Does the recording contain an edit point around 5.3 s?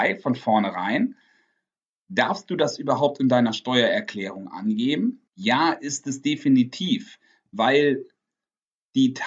yes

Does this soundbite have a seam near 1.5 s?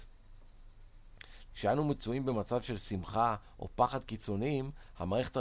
yes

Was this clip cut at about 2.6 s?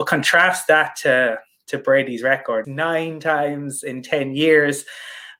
yes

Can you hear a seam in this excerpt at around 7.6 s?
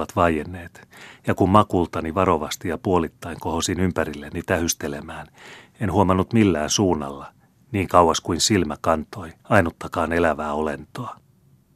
no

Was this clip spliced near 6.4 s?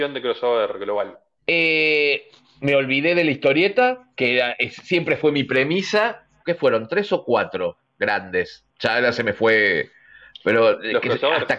yes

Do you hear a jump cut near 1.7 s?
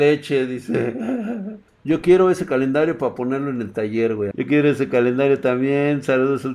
yes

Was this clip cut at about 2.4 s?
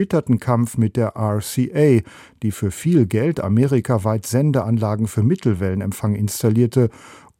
yes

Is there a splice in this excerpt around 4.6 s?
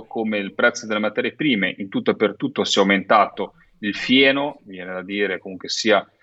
no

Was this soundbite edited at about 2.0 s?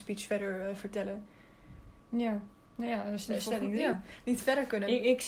yes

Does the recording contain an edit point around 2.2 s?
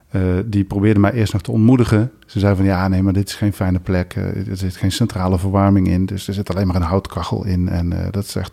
no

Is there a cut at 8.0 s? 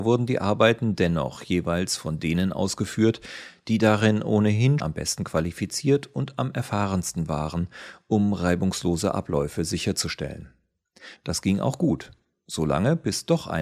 no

